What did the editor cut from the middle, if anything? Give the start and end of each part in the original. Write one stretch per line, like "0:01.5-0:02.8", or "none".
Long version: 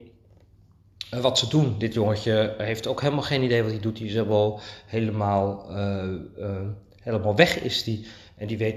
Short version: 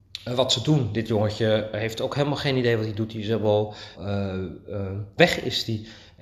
0:04.8-0:05.6
0:06.9-0:07.4